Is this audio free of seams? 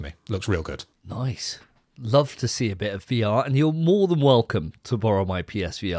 yes; 0 cuts

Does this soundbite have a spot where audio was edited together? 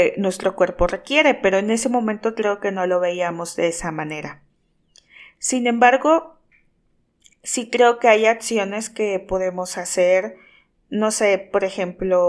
no; 0 cuts

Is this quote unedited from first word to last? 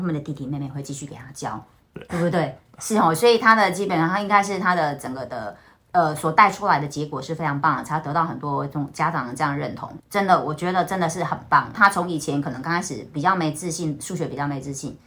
no; 2 cuts; at 10.0 s, 11.7 s

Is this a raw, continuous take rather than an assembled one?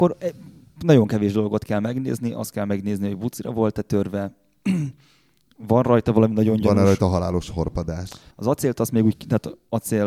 no; 1 cut; at 8.3 s

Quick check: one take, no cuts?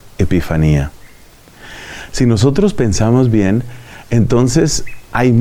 yes; 0 cuts

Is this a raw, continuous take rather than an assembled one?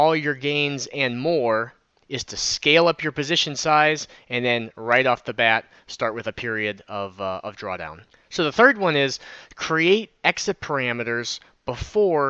yes; 0 cuts

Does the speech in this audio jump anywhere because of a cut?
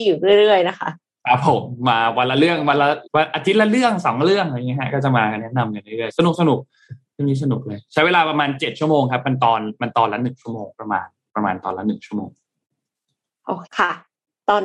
yes; 3 cuts; at 3.1 s, 10.7 s, 13.7 s

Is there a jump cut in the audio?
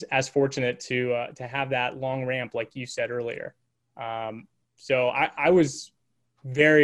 no; 0 cuts

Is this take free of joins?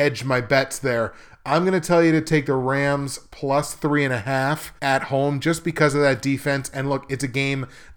no; 1 cut; at 4.8 s

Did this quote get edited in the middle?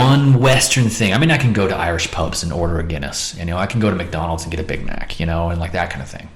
no; 0 cuts

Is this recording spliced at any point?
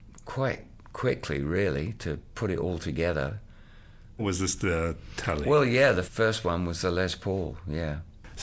yes; 2 cuts; at 4.2 s, 6.0 s

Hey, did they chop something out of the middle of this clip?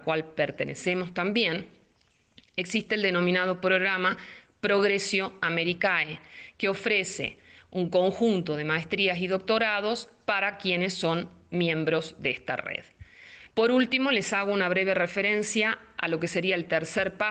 yes; 1 cut; at 13.5 s

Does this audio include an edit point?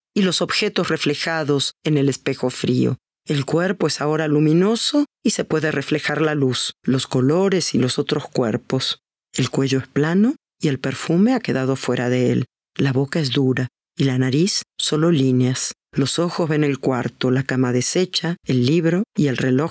yes; 2 cuts; at 3.1 s, 18.4 s

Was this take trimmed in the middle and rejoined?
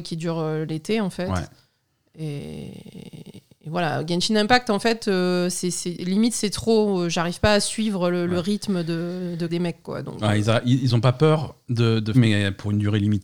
yes; 2 cuts; at 9.5 s, 12.1 s

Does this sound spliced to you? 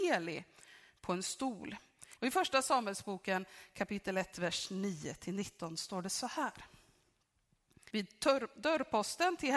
yes; 2 cuts; at 2.2 s, 7.9 s

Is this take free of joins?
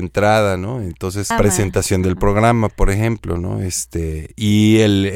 no; 1 cut; at 1.3 s

